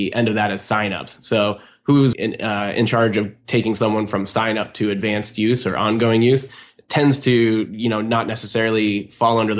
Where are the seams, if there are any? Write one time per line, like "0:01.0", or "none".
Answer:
0:02.1